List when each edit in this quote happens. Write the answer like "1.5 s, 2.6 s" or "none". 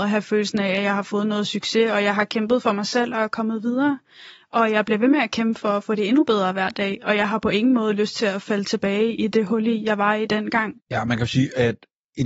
10.8 s